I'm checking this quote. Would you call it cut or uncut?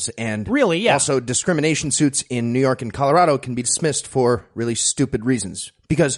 uncut